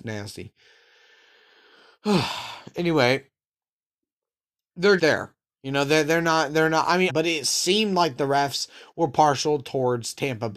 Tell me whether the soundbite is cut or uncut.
cut